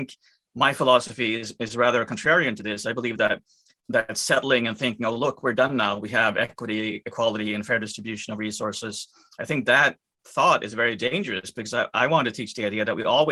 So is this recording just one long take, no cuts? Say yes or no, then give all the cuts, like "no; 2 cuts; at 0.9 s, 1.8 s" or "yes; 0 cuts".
yes; 0 cuts